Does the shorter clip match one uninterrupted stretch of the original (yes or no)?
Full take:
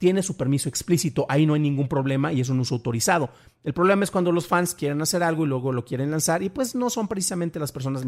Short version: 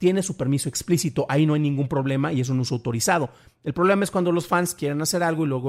yes